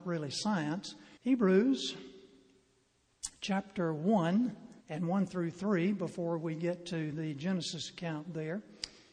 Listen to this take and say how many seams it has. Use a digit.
2